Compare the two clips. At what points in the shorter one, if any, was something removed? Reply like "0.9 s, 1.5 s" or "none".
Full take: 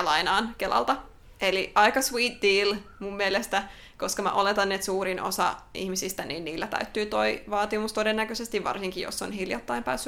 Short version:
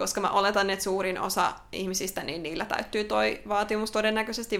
none